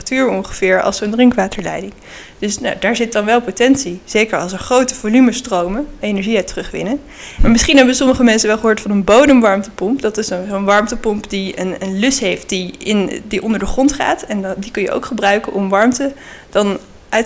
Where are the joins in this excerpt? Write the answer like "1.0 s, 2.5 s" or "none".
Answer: 6.0 s, 7.4 s